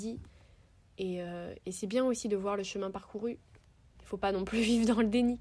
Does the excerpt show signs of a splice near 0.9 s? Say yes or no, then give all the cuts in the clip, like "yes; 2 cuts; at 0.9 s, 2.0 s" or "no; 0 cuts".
no; 1 cut; at 4.0 s